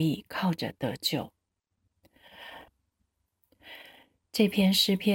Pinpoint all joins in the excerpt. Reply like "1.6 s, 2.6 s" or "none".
2.7 s